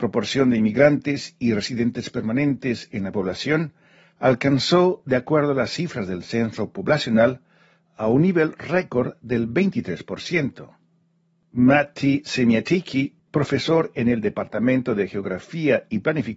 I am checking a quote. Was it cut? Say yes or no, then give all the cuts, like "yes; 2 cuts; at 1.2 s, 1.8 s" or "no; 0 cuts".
no; 0 cuts